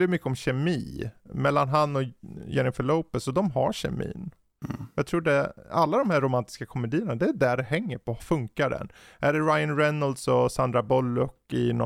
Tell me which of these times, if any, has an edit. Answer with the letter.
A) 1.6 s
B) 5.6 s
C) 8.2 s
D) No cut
C